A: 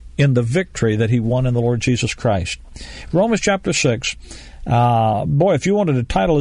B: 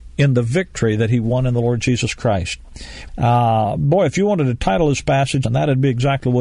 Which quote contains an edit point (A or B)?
B